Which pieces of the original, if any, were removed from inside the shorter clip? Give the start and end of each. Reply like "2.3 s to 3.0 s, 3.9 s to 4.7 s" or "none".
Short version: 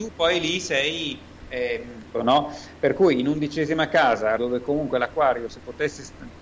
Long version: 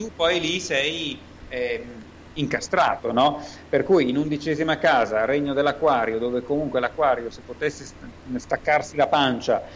2.1 s to 3.0 s, 5.3 s to 6.2 s